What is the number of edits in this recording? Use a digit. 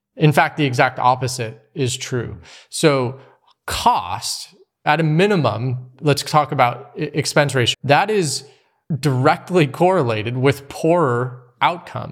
1